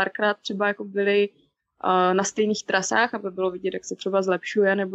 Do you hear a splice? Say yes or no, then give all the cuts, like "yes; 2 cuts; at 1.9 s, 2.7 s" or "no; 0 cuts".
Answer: no; 0 cuts